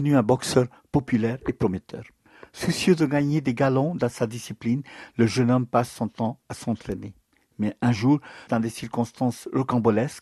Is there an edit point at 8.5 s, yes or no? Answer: yes